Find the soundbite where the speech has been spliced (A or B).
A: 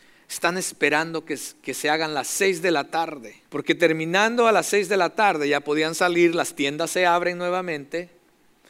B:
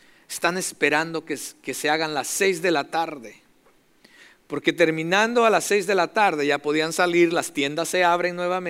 A